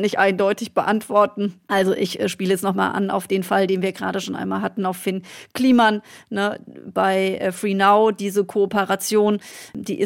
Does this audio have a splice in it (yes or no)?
no